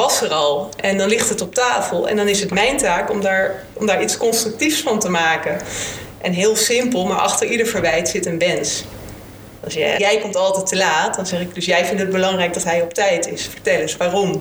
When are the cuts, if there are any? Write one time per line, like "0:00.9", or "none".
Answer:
0:10.0